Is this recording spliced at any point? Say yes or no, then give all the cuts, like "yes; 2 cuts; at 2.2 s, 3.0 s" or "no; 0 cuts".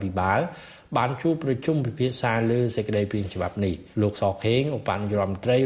yes; 1 cut; at 3.9 s